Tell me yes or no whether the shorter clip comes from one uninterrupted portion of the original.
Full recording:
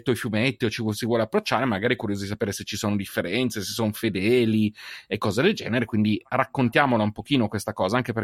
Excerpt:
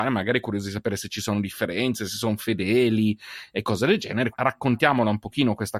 no